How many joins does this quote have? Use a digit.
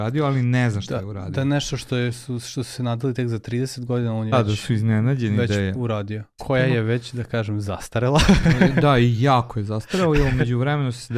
2